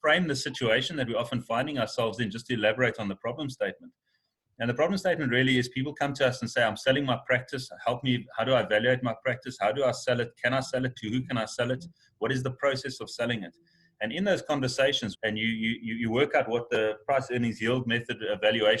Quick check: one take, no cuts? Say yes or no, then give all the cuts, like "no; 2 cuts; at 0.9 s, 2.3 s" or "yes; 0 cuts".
no; 1 cut; at 15.1 s